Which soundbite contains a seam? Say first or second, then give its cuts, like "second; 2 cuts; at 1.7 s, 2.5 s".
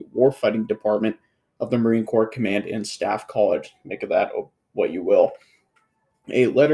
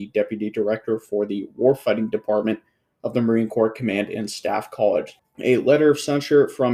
second; 1 cut; at 5.2 s